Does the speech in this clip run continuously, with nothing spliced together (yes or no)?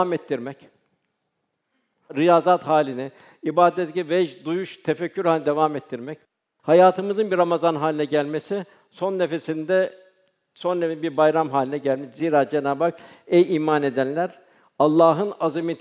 yes